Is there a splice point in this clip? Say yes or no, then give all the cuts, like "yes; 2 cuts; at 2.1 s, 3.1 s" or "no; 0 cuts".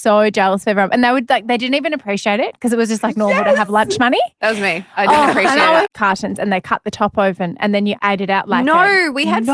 yes; 2 cuts; at 5.8 s, 8.0 s